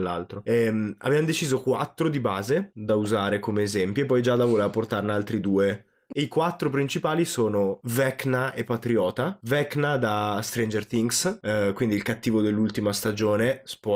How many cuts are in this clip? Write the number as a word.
one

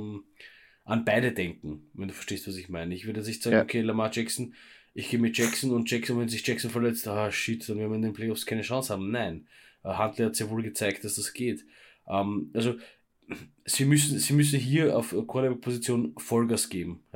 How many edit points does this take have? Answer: zero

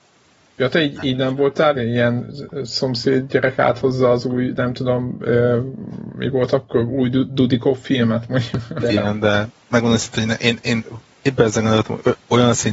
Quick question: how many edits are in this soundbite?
two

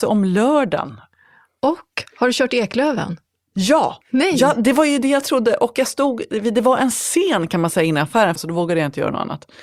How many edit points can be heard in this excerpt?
two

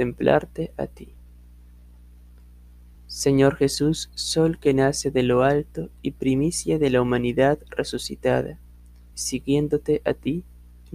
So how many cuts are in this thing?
two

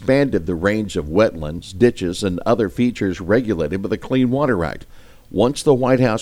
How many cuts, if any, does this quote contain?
zero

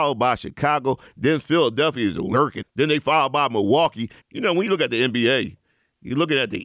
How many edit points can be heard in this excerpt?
two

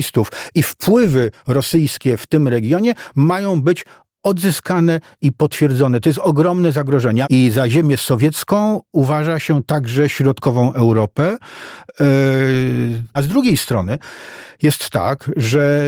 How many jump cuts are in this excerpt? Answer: two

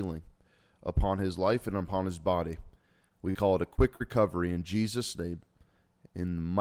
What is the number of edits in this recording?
zero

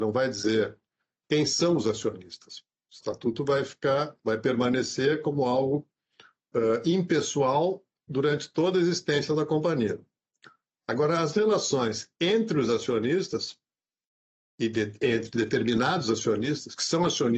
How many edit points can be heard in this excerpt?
zero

